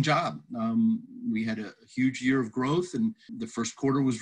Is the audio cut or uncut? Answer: cut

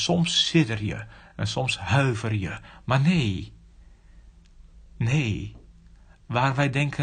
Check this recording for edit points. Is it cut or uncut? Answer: uncut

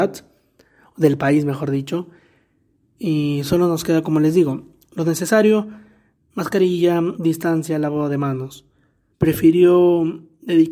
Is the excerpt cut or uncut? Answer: cut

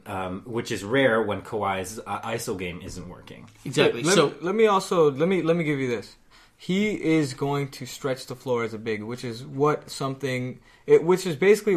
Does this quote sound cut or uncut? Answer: uncut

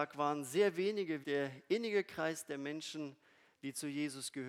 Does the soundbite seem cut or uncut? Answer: cut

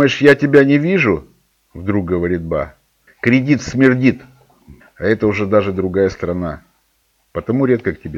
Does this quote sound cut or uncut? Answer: cut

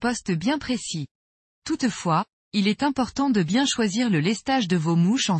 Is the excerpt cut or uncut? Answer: cut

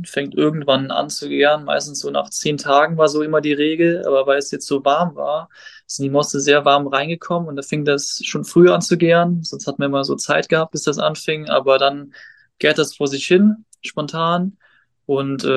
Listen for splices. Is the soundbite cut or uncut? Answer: uncut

